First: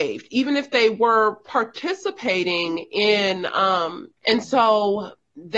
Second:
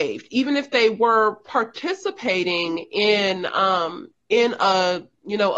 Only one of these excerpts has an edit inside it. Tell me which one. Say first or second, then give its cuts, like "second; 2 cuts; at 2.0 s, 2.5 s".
first; 1 cut; at 4.2 s